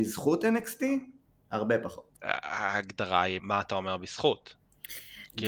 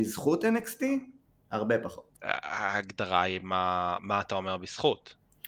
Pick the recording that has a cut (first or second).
first